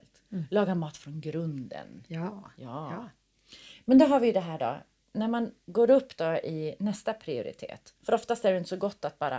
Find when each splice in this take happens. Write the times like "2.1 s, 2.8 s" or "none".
8.0 s